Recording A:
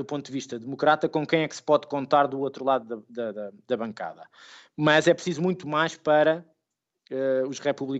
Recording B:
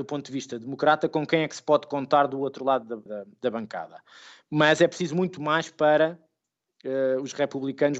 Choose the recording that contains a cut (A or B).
B